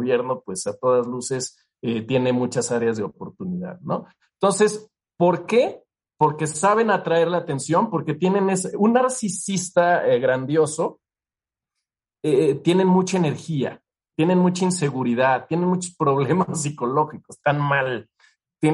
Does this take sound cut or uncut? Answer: uncut